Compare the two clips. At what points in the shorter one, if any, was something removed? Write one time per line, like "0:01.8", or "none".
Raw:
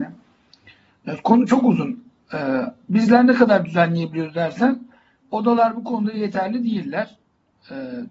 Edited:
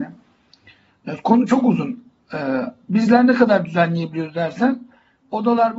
none

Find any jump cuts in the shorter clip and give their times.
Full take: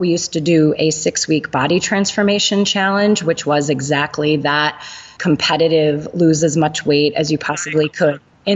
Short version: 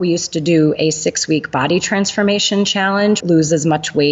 0:03.2

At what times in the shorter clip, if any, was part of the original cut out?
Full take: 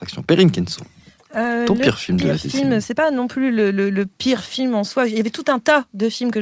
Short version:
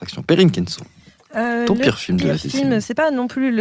none

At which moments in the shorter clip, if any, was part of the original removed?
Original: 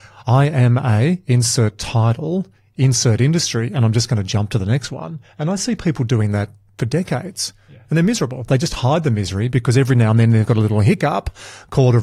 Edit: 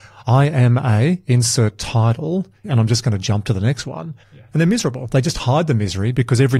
0:02.6
0:04.2

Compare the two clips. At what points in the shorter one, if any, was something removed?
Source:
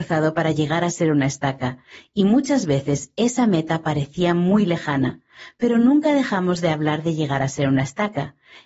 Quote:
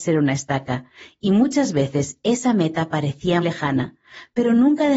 0:03.4

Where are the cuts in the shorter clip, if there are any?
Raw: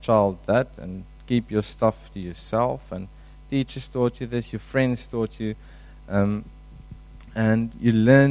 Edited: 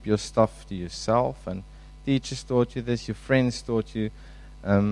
none

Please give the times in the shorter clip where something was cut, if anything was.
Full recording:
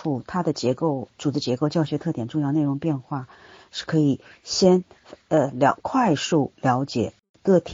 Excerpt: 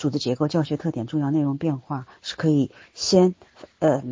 0:02.2

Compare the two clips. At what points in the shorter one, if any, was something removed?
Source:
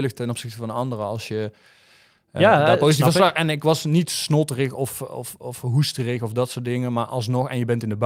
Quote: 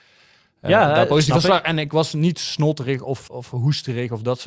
0:03.3

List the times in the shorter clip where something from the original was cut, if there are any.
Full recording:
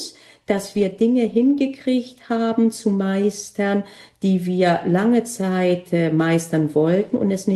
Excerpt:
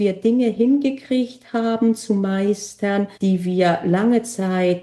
0:03.1

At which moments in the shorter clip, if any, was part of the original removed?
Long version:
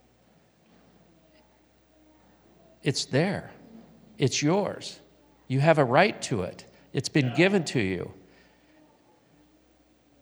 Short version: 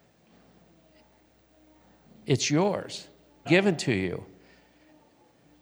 0:02.1
0:03.5

